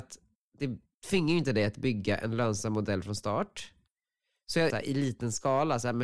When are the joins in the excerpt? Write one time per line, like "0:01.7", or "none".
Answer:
0:04.7

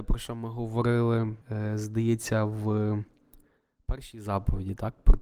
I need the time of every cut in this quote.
0:01.4

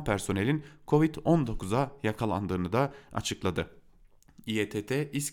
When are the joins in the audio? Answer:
none

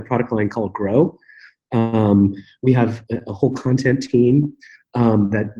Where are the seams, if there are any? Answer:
none

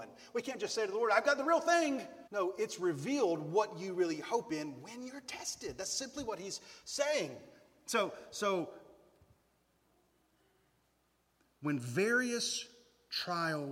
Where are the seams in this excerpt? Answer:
0:02.3

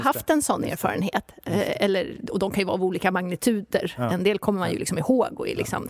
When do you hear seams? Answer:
none

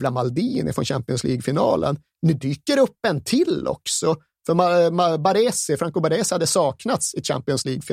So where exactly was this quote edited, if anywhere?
none

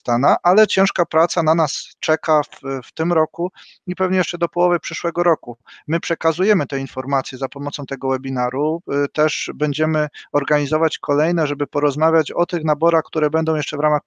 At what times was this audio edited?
none

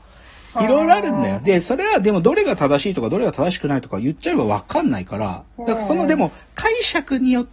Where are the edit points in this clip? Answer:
none

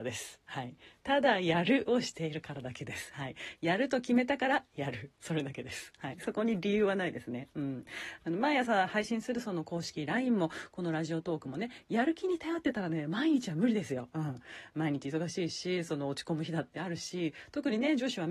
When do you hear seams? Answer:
none

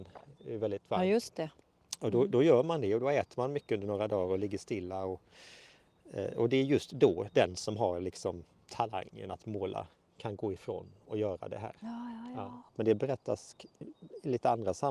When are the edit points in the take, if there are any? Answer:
0:12.7

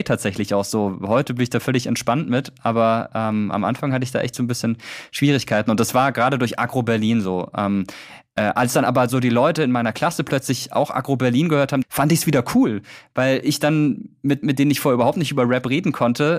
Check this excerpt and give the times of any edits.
0:11.8
0:14.4

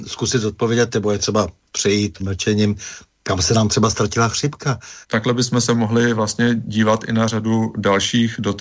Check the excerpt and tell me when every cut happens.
0:02.2
0:05.0

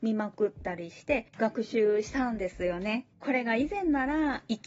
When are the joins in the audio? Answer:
0:03.1

